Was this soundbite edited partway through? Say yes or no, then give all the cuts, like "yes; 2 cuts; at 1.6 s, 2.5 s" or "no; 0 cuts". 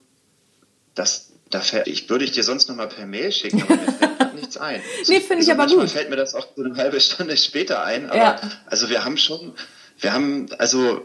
yes; 2 cuts; at 1.8 s, 6.6 s